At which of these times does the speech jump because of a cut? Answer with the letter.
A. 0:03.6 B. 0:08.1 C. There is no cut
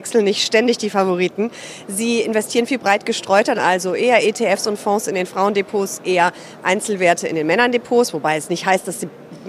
A